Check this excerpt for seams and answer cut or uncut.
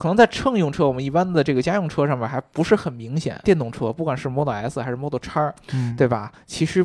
cut